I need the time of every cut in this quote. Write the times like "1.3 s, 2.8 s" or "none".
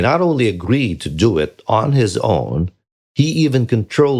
none